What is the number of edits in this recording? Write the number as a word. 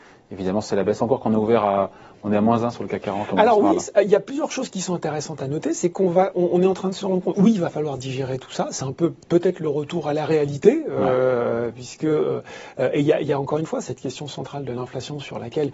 zero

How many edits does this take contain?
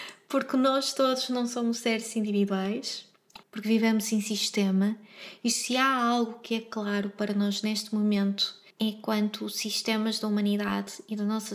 two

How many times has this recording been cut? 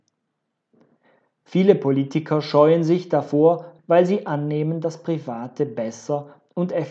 one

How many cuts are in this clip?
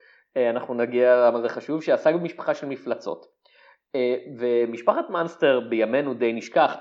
zero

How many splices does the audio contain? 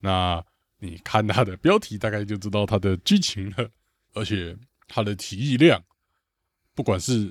one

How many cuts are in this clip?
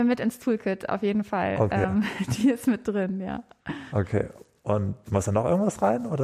zero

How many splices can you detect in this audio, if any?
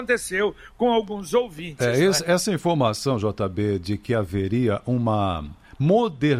zero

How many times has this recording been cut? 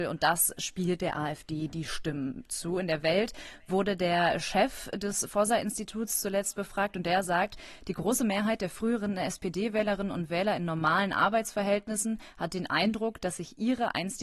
zero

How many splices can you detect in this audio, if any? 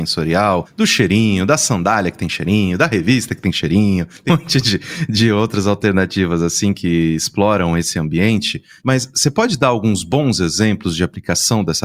one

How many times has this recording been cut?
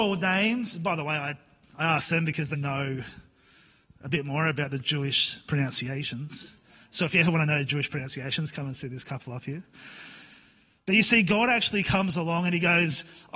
one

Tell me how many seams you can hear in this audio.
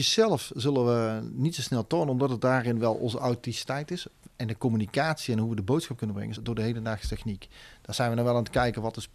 one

